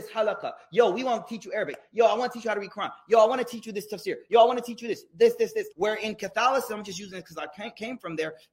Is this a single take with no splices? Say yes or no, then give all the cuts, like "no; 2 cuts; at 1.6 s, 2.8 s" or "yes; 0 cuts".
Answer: no; 1 cut; at 5.7 s